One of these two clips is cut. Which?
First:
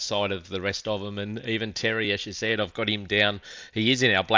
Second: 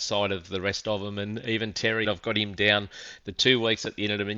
second; 2 cuts; at 2.0 s, 3.2 s

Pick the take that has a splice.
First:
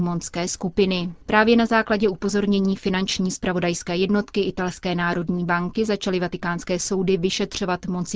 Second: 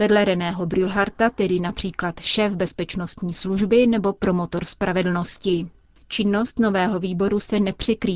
first; 1 cut; at 1.2 s

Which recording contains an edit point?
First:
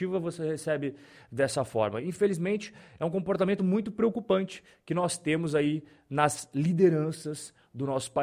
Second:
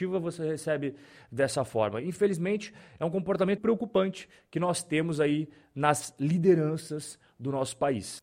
second; 1 cut; at 3.6 s

